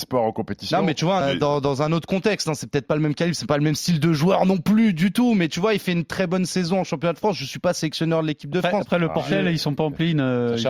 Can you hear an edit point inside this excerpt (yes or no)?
yes